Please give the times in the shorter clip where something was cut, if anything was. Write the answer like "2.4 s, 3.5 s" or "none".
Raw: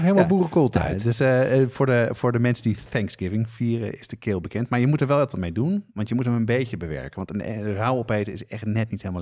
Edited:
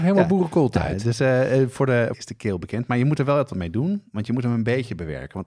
2.1 s